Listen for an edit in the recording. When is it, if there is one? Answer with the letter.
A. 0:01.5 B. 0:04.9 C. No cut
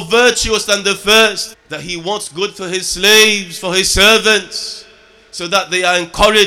A